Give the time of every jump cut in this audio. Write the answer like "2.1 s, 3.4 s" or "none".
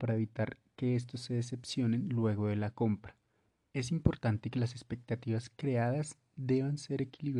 3.7 s